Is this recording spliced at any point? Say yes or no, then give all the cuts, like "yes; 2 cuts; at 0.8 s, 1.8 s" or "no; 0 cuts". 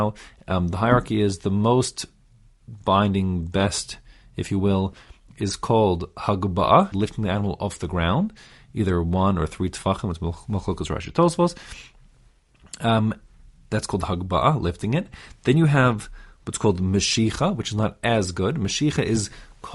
yes; 1 cut; at 6.9 s